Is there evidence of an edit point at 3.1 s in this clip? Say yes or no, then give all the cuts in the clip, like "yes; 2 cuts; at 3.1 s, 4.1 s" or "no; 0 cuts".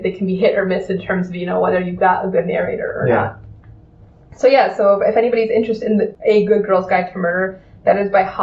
no; 0 cuts